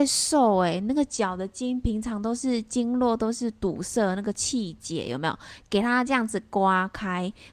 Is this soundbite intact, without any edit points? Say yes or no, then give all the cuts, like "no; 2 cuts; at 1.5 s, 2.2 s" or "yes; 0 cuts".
yes; 0 cuts